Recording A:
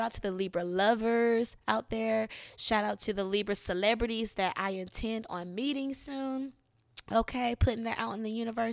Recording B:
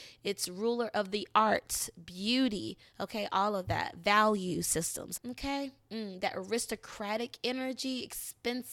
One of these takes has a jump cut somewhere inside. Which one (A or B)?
B